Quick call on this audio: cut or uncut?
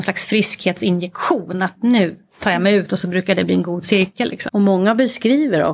cut